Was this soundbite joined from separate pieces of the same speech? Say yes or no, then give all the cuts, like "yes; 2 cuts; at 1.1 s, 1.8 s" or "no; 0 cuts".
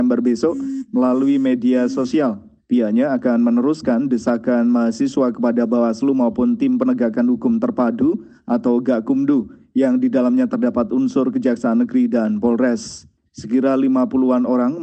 yes; 2 cuts; at 2.6 s, 13.3 s